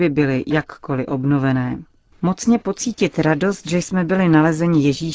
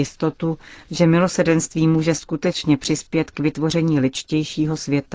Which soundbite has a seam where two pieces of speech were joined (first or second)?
first